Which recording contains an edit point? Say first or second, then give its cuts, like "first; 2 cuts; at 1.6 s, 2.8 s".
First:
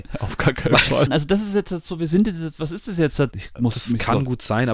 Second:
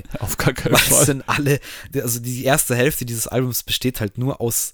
first; 2 cuts; at 1.1 s, 3.3 s